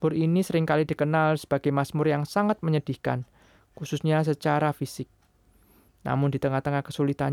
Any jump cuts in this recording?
no; 0 cuts

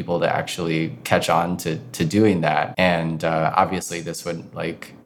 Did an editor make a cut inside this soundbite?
yes; 1 cut; at 2.7 s

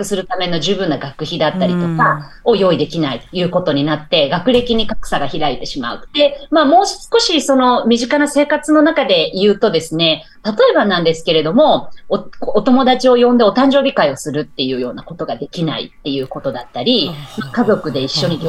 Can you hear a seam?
yes; 1 cut; at 6.1 s

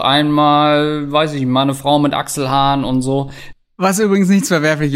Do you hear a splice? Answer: yes; 1 cut; at 3.5 s

